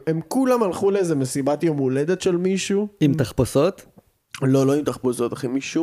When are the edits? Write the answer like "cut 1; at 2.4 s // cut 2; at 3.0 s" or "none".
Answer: none